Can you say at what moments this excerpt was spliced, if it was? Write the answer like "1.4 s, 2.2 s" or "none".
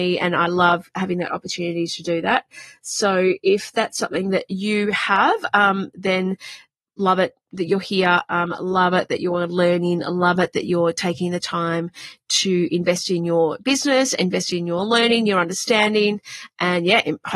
none